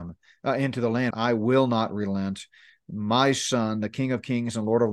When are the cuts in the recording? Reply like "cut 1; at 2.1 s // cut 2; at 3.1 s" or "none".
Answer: cut 1; at 1.1 s